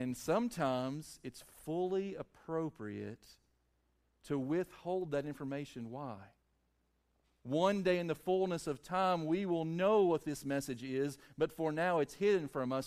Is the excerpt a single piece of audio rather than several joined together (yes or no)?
no